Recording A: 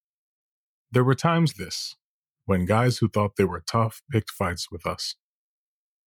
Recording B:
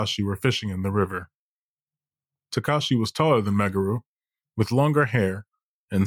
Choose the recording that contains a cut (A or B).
A